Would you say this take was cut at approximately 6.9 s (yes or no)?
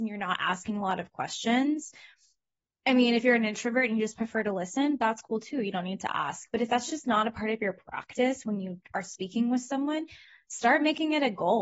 no